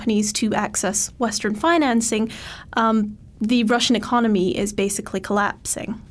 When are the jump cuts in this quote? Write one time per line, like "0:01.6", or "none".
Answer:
none